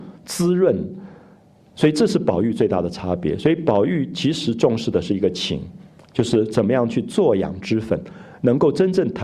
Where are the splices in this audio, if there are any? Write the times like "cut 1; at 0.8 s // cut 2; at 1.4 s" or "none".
cut 1; at 1.7 s